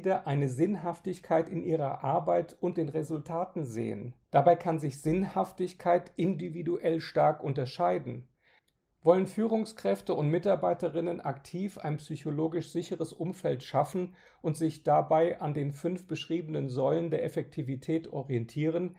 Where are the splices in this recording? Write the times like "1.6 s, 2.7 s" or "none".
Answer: 4.2 s, 8.9 s